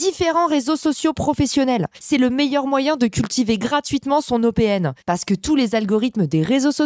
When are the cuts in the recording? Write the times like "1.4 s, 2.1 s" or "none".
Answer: none